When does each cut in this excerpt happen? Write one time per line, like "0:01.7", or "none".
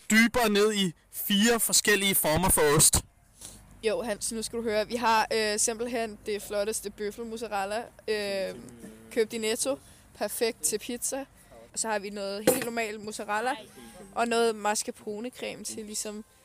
0:11.7